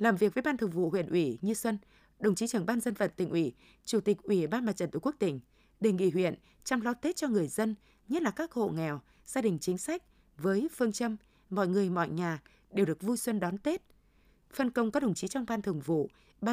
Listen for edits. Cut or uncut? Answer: uncut